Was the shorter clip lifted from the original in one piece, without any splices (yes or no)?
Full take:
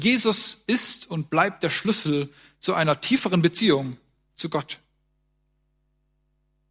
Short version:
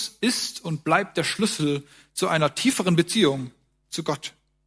yes